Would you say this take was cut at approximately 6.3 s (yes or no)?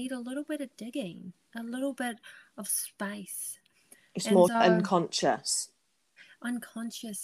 no